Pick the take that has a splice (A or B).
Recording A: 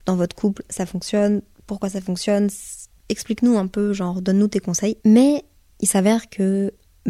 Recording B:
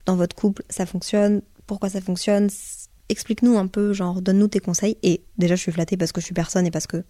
A